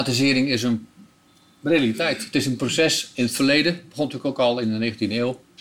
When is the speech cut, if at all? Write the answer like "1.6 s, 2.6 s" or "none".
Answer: none